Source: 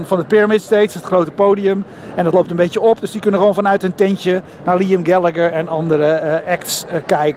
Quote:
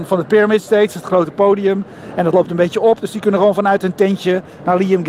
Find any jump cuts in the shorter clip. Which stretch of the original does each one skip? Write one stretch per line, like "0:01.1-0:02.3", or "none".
none